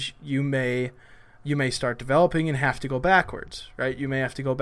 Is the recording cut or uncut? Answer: uncut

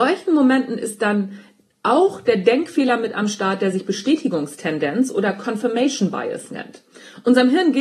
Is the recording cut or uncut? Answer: uncut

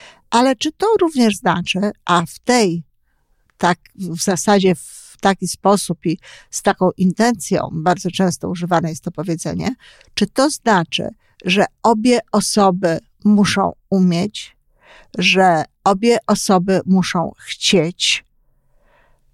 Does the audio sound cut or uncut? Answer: uncut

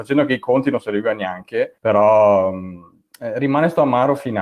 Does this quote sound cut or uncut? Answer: cut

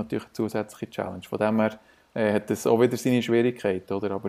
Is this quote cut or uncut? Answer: uncut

